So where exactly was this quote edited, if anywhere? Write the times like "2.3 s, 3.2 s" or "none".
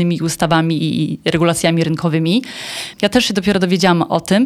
2.9 s